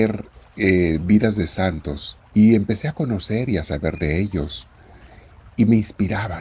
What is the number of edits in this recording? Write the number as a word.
one